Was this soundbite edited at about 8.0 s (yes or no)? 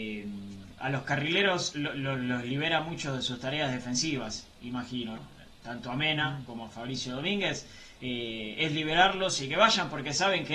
no